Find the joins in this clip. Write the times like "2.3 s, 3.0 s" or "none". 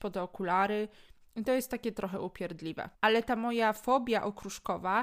2.9 s